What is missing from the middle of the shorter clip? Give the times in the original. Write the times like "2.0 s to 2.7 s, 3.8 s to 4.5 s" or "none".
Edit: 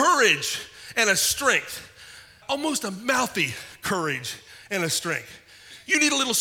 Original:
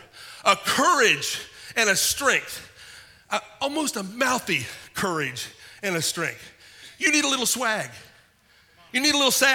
3.2 s to 3.5 s